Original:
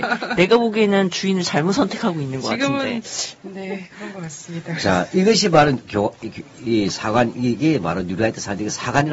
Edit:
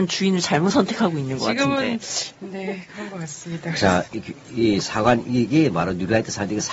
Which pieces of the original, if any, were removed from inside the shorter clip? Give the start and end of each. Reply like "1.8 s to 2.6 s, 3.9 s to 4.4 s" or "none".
5.1 s to 6.2 s